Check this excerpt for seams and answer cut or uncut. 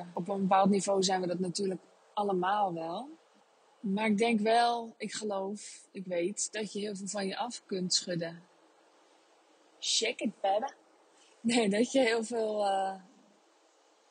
uncut